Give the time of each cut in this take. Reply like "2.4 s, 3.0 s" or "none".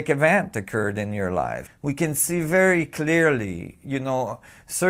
1.7 s